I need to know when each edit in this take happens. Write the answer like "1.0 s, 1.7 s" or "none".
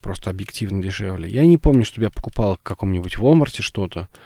none